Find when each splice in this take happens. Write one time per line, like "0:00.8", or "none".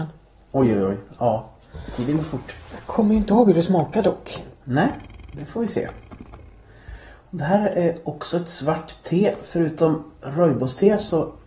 none